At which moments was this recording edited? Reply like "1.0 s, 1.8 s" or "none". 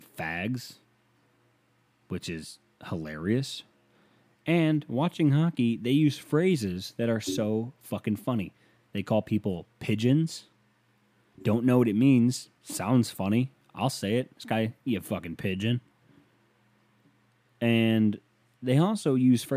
none